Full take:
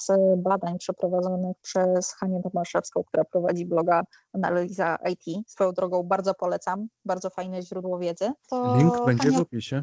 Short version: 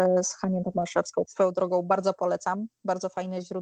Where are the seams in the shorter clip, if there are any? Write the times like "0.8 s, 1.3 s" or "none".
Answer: 1.2 s